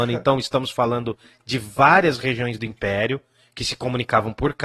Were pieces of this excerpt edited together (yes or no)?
no